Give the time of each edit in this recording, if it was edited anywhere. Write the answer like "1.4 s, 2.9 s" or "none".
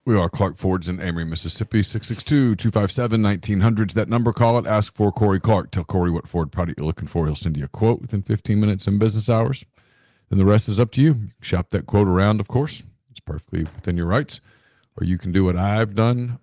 none